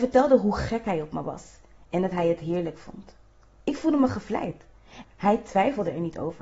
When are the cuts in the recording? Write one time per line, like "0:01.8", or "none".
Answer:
0:05.0